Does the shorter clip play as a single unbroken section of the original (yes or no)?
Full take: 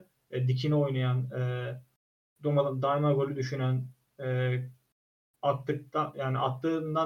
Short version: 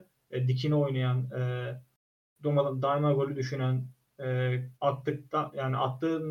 no